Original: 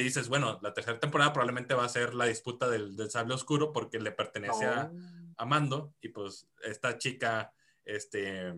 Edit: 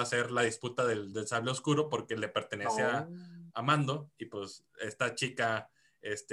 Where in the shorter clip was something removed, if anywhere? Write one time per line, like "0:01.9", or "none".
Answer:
none